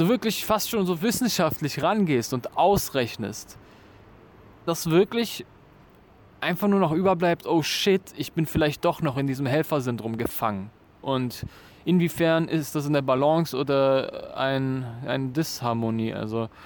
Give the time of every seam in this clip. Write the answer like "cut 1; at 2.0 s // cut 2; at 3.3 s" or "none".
cut 1; at 4.7 s // cut 2; at 10.9 s